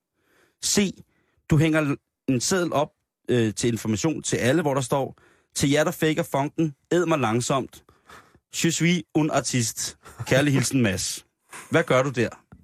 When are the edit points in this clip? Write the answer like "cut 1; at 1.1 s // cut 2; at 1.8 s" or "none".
none